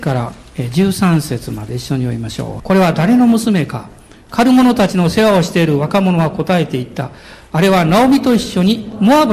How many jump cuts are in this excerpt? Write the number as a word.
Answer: one